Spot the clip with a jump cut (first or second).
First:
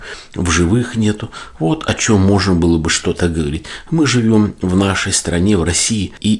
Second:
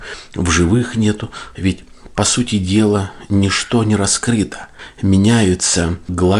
second